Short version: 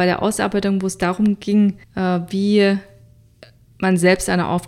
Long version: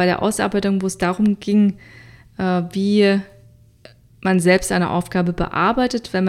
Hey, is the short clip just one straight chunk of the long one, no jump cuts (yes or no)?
no